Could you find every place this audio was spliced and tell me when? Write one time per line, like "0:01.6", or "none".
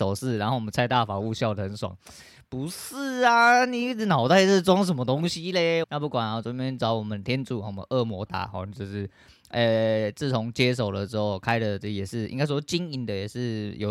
0:05.8
0:08.3